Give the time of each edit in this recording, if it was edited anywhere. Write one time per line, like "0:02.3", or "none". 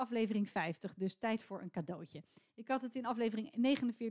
none